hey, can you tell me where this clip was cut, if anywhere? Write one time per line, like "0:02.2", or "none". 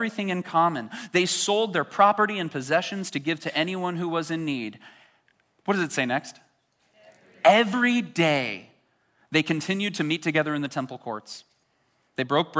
none